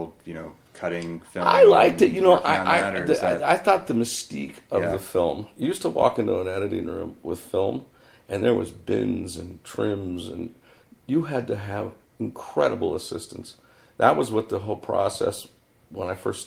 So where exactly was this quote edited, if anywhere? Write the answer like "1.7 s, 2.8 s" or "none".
none